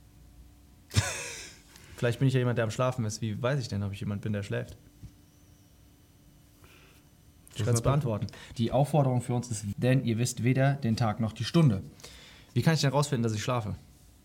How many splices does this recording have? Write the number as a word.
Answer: two